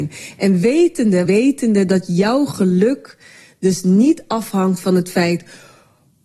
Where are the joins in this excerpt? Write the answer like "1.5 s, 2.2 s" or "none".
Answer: 1.3 s